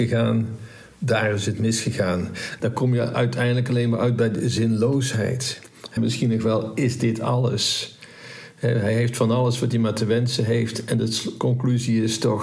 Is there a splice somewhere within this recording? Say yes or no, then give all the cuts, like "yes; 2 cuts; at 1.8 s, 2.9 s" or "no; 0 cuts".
yes; 2 cuts; at 2.6 s, 6.0 s